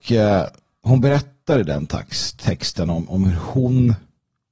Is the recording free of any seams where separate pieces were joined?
yes; 0 cuts

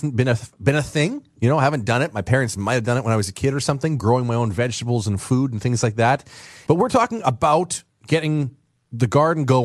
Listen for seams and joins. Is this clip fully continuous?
no; 2 cuts; at 4.0 s, 6.7 s

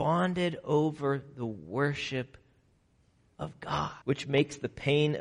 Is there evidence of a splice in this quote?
yes; 1 cut; at 4.0 s

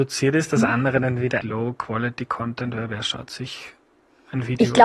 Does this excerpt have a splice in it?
yes; 1 cut; at 1.4 s

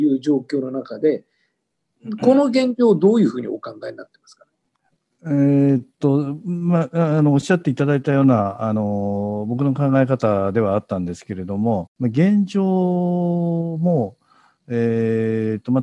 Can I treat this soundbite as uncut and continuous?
no; 1 cut; at 11.9 s

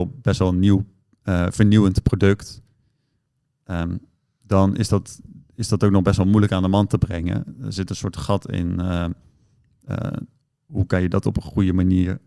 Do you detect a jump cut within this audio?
no; 0 cuts

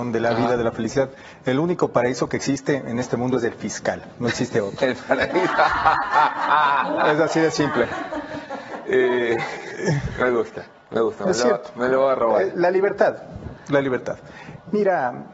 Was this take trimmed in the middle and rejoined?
no; 0 cuts

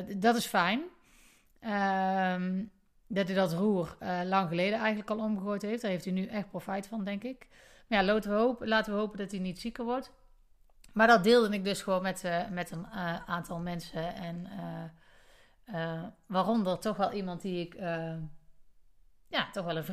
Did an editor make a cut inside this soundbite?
no; 0 cuts

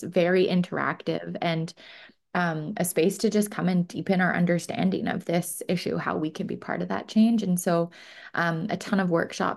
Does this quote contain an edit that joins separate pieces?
no; 0 cuts

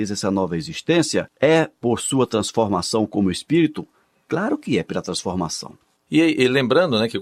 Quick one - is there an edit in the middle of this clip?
yes; 1 cut; at 6.0 s

